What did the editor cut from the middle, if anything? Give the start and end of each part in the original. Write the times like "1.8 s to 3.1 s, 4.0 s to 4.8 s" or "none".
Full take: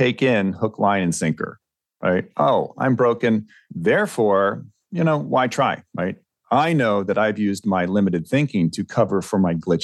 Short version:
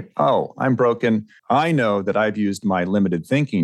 3.6 s to 6.4 s